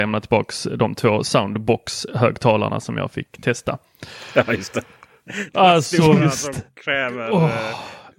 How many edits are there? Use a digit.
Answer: 0